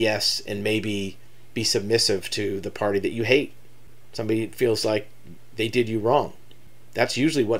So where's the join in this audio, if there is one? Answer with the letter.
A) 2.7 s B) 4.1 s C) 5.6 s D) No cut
D